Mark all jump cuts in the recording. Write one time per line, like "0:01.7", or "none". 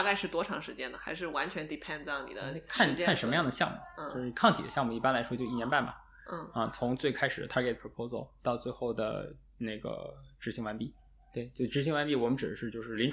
none